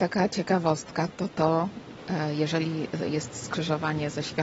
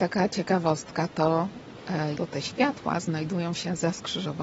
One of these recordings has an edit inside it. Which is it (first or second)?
second